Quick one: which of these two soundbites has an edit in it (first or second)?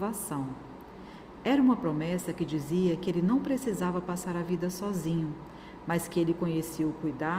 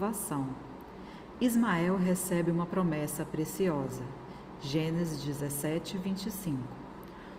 first